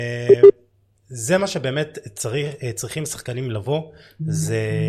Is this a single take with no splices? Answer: yes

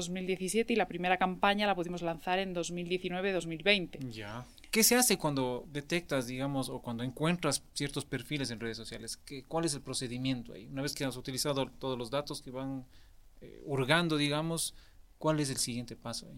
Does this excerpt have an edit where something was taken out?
yes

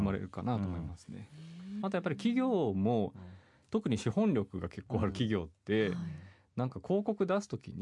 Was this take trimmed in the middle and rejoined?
yes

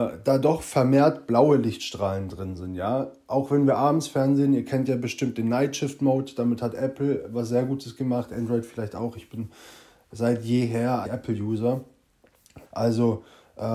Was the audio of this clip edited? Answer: yes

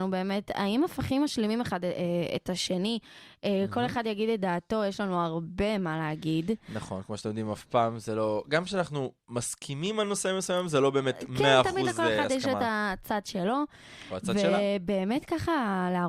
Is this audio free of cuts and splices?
yes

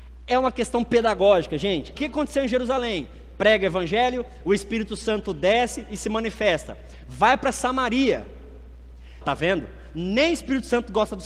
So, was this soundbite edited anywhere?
yes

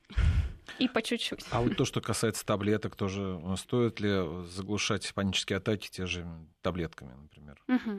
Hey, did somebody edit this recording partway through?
no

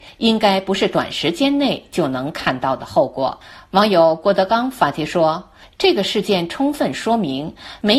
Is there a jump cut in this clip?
no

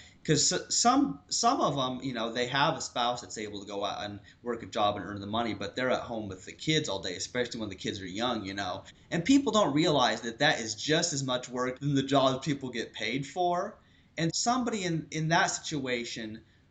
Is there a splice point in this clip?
yes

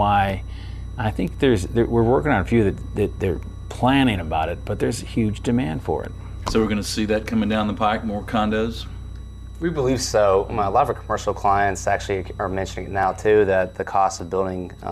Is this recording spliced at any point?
yes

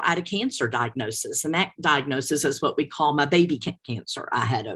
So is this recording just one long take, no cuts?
yes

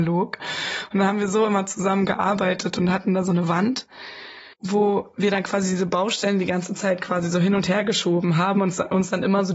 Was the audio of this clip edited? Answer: yes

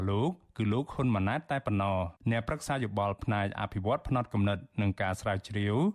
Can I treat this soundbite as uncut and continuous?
no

